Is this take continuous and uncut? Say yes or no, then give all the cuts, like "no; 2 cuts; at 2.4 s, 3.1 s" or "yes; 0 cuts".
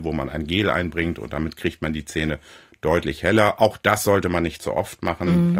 yes; 0 cuts